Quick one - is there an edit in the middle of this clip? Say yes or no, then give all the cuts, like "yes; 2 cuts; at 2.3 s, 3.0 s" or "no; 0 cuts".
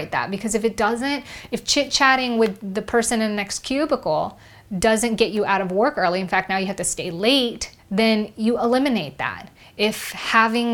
yes; 1 cut; at 7.8 s